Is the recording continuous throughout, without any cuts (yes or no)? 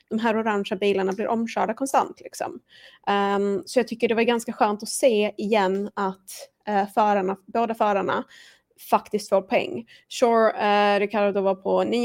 yes